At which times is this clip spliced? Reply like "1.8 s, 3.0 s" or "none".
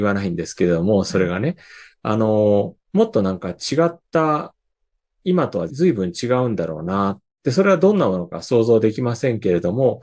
5.7 s